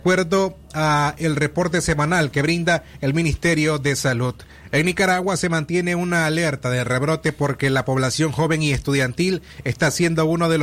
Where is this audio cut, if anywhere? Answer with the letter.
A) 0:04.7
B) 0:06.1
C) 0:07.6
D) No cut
A